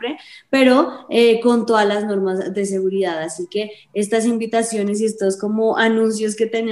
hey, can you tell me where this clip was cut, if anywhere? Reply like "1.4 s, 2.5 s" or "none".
none